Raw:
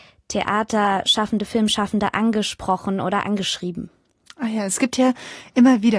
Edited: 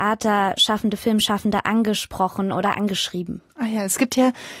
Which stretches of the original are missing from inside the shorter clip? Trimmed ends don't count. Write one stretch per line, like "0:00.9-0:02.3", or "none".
0:04.0-0:04.3